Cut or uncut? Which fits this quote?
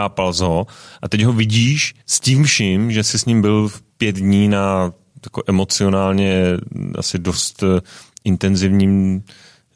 cut